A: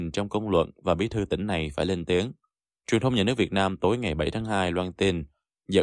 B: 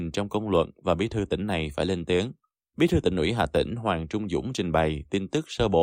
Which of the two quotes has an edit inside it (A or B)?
B